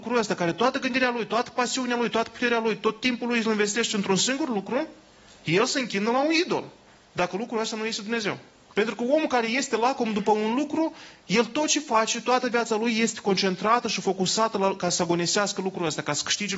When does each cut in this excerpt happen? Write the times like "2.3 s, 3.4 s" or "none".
8.7 s